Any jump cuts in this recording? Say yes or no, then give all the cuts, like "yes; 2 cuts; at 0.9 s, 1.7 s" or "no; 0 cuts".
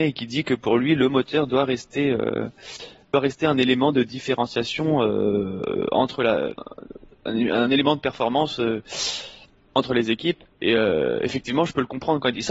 no; 0 cuts